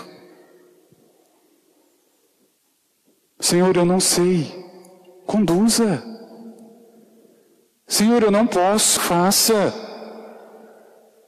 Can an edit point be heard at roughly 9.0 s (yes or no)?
yes